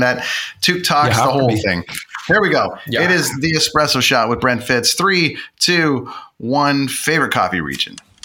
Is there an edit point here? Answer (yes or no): no